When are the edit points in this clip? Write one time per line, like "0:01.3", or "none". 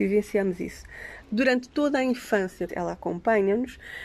0:01.2
0:02.7